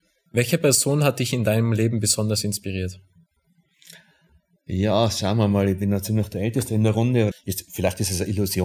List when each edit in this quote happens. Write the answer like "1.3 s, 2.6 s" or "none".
7.3 s